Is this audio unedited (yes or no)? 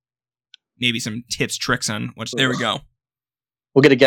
no